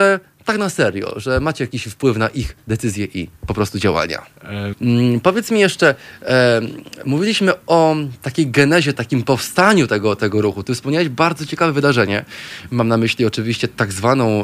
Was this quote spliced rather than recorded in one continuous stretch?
yes; 2 cuts; at 4.7 s, 9.0 s

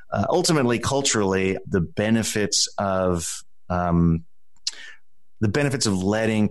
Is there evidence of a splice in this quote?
yes; 1 cut; at 1.6 s

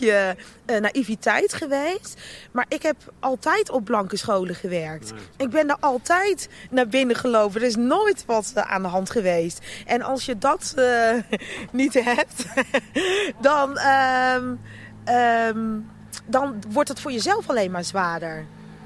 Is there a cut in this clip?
yes; 1 cut; at 16.6 s

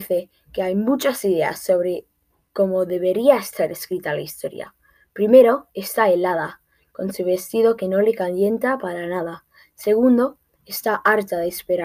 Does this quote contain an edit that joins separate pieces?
no; 0 cuts

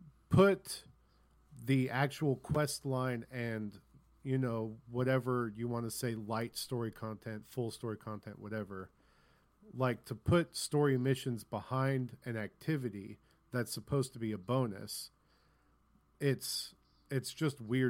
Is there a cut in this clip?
no; 0 cuts

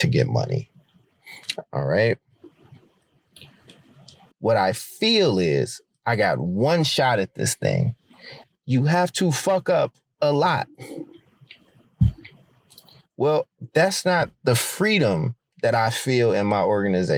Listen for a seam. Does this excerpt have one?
yes; 2 cuts; at 4.3 s, 8.5 s

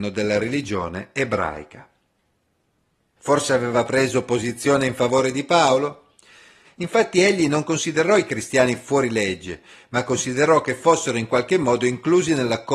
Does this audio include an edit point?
yes; 2 cuts; at 3.2 s, 6.7 s

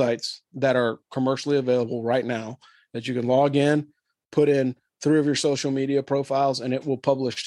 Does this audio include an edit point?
no; 0 cuts

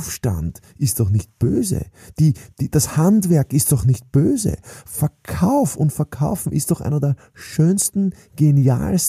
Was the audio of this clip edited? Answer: no; 0 cuts

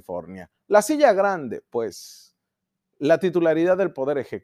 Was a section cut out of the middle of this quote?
no; 0 cuts

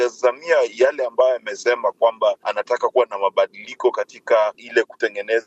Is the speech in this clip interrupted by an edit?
yes; 1 cut; at 2.4 s

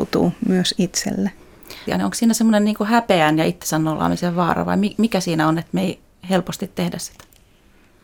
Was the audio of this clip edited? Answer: yes; 1 cut; at 1.9 s

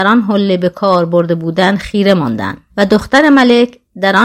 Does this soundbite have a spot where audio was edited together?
yes; 1 cut; at 2.7 s

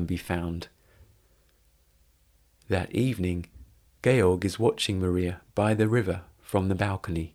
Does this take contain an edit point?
no; 0 cuts

